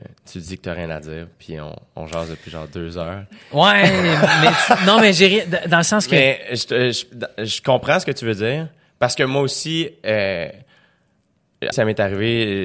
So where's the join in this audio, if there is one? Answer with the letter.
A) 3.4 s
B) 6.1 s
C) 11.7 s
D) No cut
C